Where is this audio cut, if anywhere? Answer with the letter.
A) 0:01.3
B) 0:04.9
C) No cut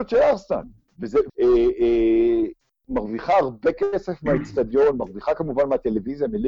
A